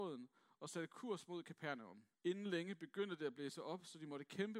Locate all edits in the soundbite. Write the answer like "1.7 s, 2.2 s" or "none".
2.1 s